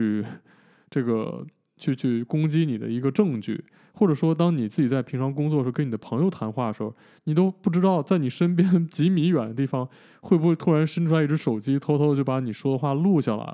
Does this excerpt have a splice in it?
no; 0 cuts

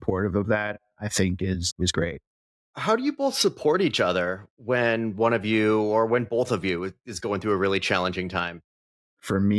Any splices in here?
no; 0 cuts

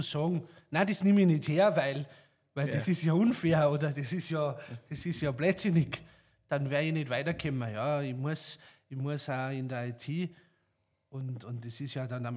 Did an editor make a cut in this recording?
no; 0 cuts

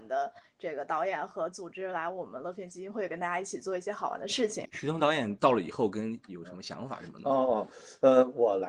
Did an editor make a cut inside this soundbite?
yes; 2 cuts; at 4.7 s, 6.3 s

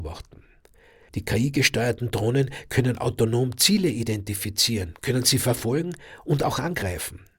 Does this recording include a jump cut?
yes; 1 cut; at 1.1 s

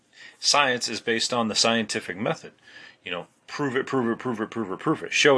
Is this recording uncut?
yes; 0 cuts

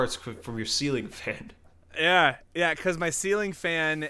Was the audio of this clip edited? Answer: no; 0 cuts

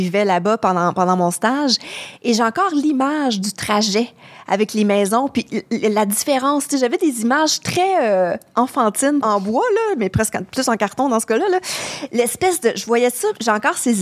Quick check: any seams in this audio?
yes; 1 cut; at 9.2 s

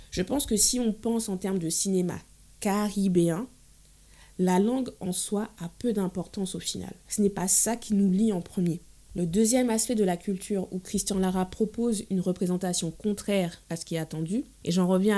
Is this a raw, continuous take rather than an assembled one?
yes; 0 cuts

